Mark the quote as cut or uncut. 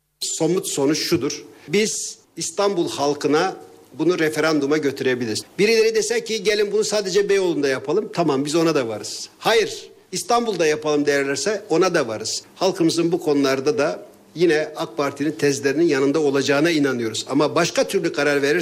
uncut